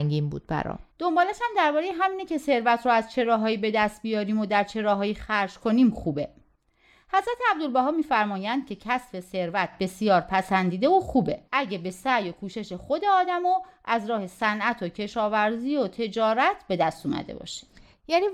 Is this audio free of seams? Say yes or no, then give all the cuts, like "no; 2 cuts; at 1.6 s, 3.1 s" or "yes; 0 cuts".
no; 2 cuts; at 0.9 s, 11.5 s